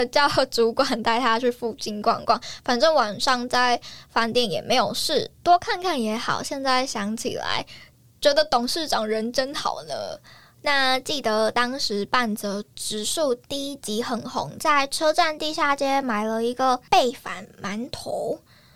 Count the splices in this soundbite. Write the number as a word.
zero